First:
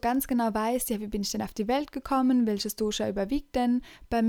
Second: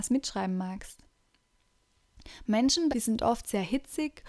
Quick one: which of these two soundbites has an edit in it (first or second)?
second